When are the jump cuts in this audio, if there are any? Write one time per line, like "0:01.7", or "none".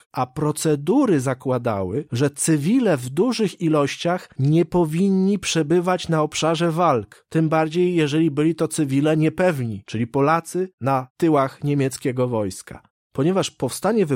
0:13.0